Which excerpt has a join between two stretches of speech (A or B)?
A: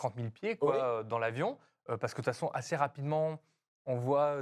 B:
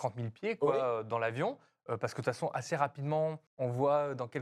B